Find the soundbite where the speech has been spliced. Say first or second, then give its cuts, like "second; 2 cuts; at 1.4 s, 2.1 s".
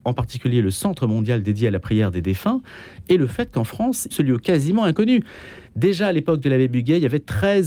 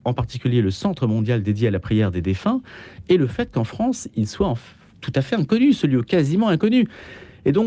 first; 2 cuts; at 4.1 s, 5.7 s